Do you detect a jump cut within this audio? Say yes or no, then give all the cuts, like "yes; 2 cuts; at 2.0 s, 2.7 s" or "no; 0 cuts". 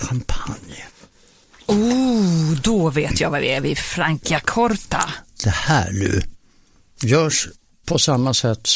no; 0 cuts